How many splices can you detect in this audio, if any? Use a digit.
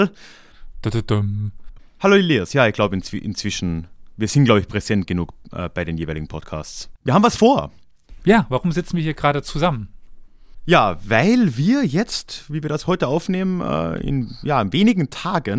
1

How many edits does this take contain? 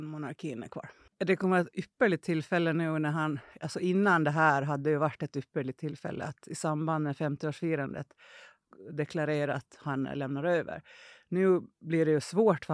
1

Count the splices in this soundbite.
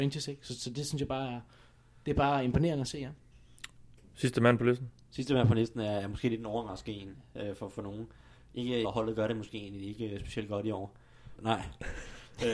2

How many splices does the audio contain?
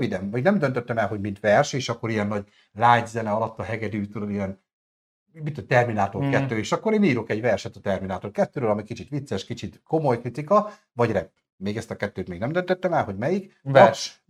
0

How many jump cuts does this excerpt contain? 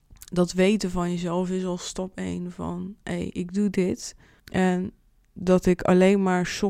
1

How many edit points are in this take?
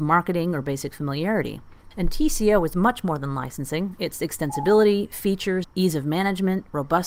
2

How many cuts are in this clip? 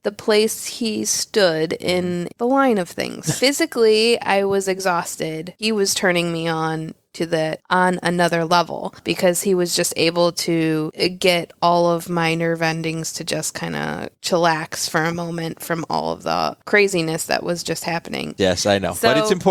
3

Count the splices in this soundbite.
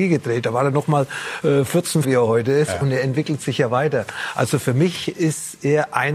1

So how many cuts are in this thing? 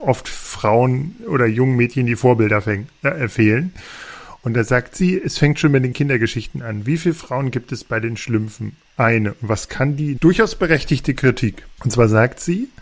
2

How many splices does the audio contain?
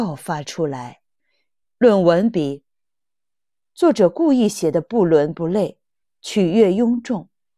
2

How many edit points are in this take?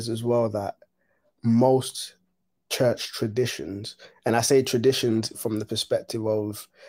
0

